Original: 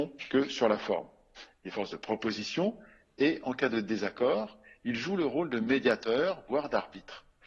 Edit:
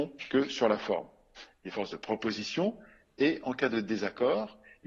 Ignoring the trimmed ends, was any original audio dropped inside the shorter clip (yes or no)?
no